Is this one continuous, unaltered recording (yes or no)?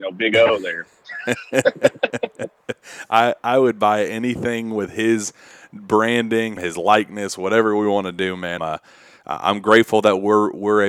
no